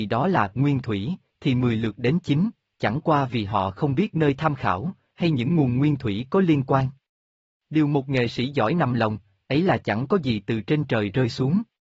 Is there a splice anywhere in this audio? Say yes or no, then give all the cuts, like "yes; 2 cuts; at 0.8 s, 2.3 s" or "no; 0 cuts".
no; 0 cuts